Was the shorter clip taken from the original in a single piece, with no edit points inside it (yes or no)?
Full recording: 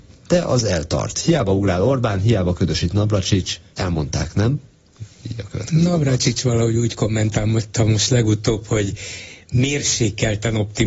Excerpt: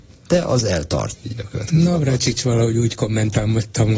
no